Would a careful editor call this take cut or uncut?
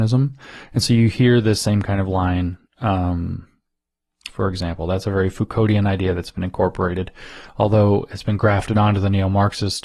cut